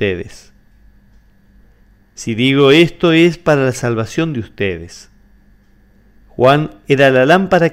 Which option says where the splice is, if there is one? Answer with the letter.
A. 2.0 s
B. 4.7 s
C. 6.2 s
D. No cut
A